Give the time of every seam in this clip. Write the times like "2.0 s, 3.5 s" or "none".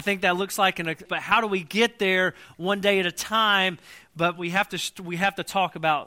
1.1 s

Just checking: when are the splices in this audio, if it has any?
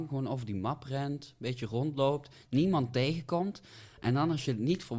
none

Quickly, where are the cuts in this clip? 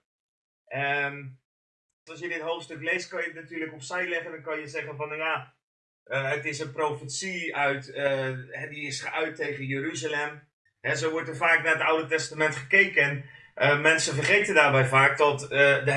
2.1 s, 10.7 s

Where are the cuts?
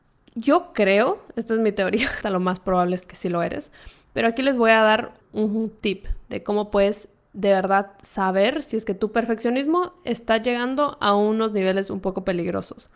2.2 s, 5.2 s

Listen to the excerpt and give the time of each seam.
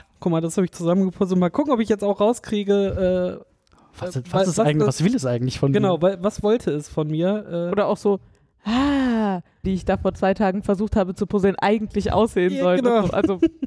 9.6 s

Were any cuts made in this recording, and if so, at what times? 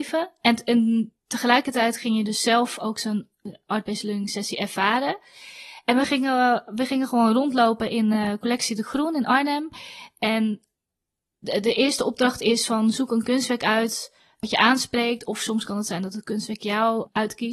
none

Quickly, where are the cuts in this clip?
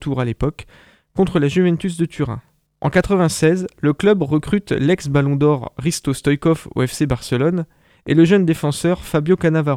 2.7 s

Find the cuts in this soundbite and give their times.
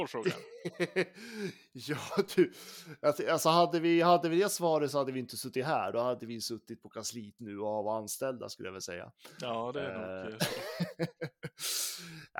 7.4 s

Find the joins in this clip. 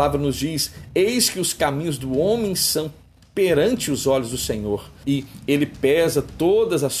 5.0 s

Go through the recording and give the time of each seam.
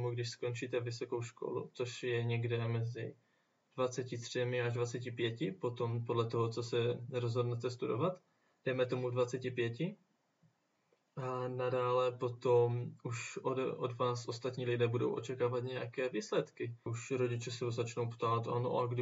16.9 s

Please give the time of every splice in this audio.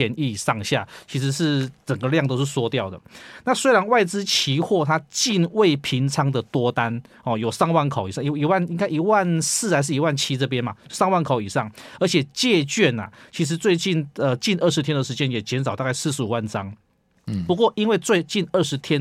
none

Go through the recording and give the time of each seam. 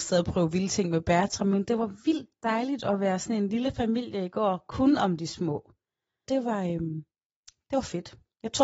6.3 s

